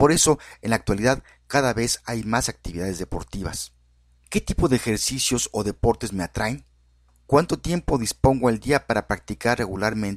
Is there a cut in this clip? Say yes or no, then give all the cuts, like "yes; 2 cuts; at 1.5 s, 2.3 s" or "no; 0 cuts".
yes; 1 cut; at 4.1 s